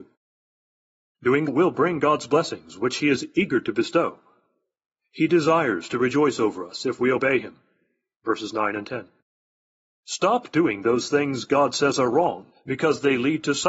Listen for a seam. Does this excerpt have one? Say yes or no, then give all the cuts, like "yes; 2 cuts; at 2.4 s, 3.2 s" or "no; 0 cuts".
yes; 2 cuts; at 1.5 s, 10.0 s